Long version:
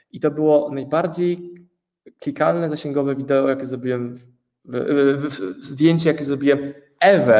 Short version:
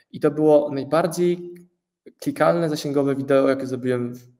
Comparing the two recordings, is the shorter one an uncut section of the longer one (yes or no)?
yes